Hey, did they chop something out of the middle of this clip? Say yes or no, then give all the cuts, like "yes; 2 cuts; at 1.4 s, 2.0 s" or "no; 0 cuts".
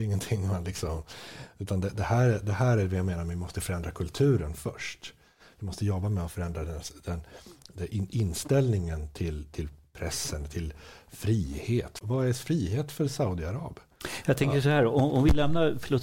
no; 0 cuts